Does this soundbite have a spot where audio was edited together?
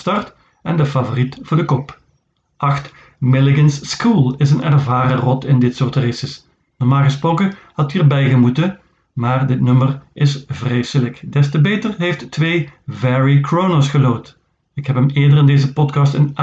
no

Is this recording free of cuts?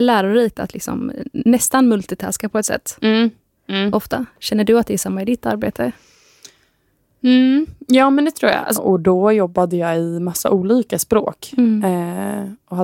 no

